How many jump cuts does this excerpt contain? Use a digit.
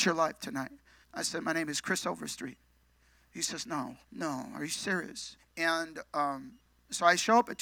3